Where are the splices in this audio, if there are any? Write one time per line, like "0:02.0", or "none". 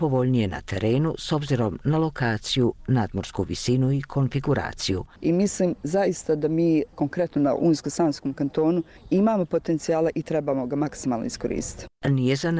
0:05.2